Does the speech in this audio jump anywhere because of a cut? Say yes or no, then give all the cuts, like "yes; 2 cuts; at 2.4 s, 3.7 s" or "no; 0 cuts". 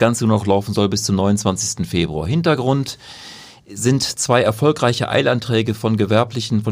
no; 0 cuts